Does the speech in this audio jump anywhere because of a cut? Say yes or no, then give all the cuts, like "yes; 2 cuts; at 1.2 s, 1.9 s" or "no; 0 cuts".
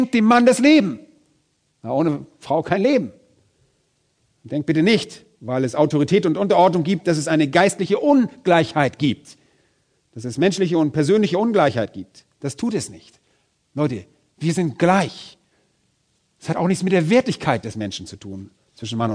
no; 0 cuts